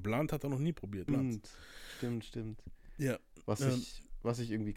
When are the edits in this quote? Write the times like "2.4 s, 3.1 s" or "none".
1.1 s